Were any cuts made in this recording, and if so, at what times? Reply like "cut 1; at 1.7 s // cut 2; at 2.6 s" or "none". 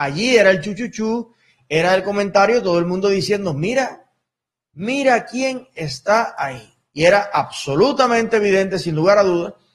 none